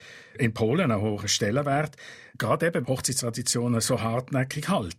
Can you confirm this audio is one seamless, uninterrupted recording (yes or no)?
no